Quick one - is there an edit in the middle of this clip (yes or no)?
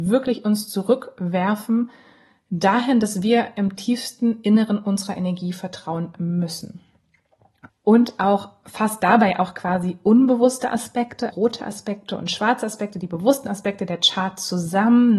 yes